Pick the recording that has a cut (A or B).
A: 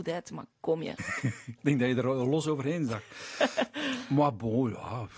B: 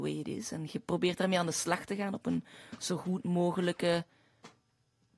A